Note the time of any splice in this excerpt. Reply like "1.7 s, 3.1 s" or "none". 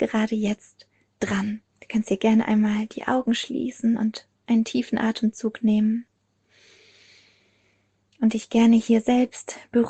1.7 s